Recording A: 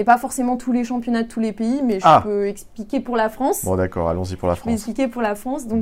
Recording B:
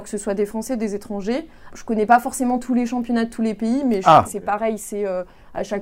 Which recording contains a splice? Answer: B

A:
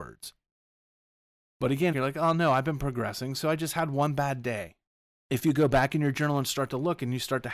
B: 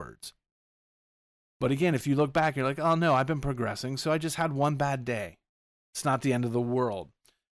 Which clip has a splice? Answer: A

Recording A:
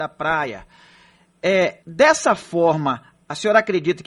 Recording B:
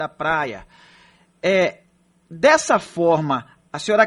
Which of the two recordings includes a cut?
A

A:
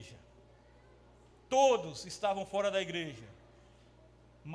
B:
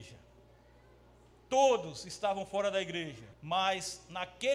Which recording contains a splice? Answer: B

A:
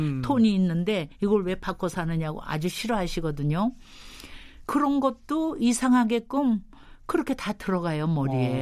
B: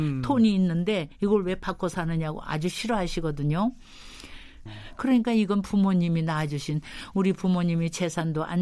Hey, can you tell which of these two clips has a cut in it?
B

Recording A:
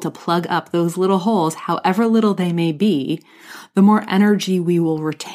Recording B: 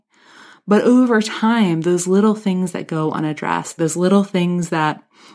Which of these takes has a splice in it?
B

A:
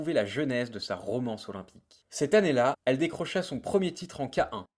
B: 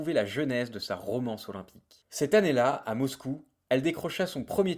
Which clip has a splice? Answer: A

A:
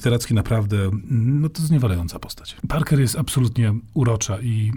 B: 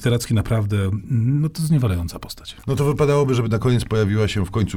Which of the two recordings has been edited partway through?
A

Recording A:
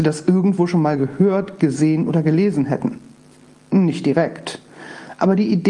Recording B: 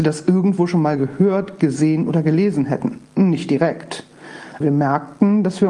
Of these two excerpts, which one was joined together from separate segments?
B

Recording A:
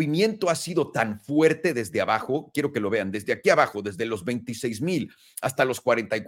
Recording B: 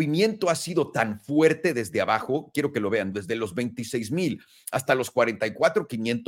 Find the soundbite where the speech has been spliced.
B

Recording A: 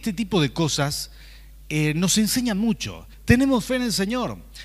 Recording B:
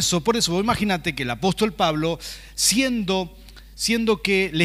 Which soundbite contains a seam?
A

